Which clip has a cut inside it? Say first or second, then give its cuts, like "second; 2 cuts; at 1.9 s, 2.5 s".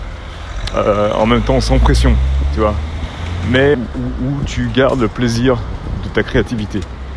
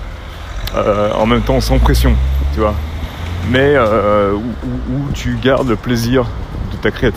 first; 1 cut; at 3.7 s